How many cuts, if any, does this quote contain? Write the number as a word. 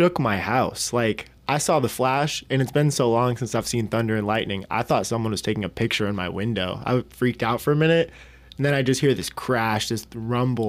one